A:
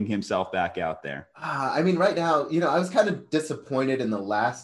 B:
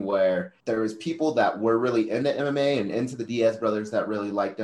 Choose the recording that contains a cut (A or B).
A